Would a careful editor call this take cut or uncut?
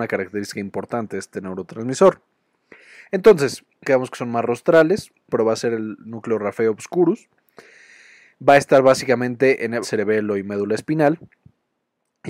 cut